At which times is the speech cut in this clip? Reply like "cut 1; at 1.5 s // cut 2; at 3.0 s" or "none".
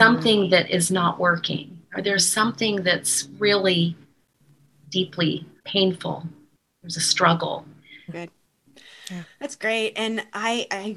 cut 1; at 5.6 s // cut 2; at 8.1 s

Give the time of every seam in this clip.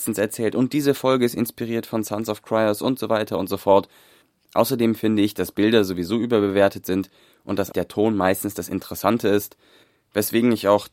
cut 1; at 4.5 s // cut 2; at 7.7 s

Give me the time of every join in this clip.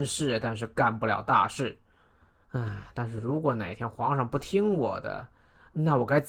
cut 1; at 2.4 s

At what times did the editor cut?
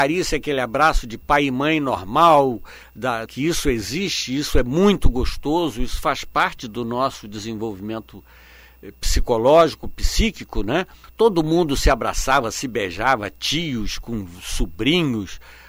cut 1; at 3.3 s // cut 2; at 11.0 s

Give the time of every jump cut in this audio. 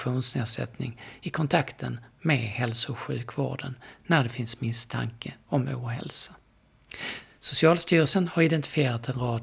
cut 1; at 7.4 s

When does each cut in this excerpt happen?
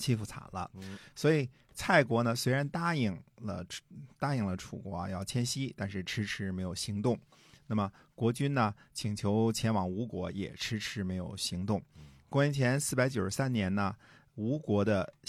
none

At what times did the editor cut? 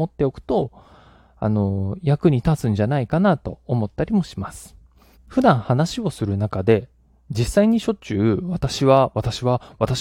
cut 1; at 5.1 s

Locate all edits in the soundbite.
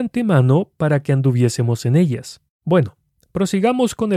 cut 1; at 2.5 s

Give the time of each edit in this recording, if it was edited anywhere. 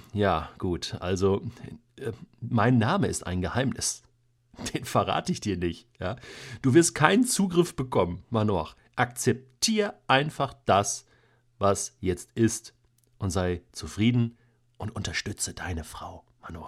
none

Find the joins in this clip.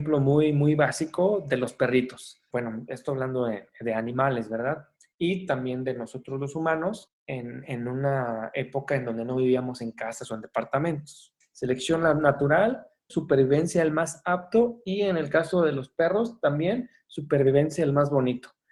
cut 1; at 2.5 s // cut 2; at 11.4 s // cut 3; at 13.1 s

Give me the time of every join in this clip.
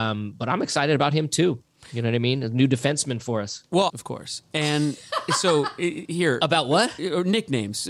cut 1; at 3.9 s

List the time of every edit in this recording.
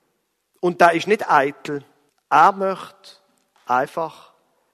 cut 1; at 2.1 s

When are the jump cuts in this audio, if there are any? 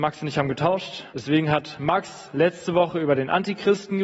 cut 1; at 1.1 s

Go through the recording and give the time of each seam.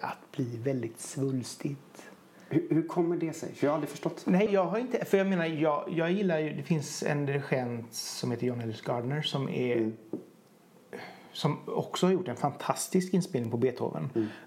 cut 1; at 4.5 s

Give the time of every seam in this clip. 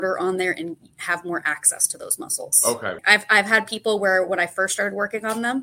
cut 1; at 3.0 s

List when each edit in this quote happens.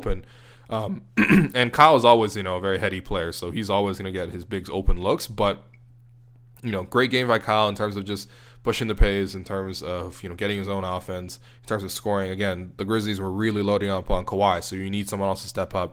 none

